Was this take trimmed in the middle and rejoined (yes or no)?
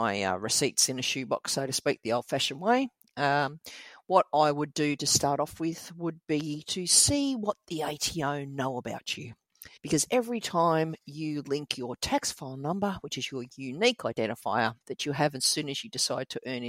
yes